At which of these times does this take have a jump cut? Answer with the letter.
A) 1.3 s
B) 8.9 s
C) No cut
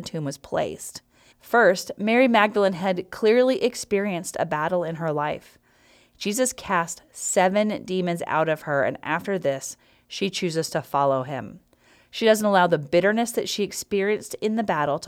A